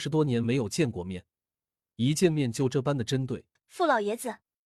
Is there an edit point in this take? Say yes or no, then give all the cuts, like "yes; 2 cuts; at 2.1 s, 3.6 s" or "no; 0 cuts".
yes; 1 cut; at 3.6 s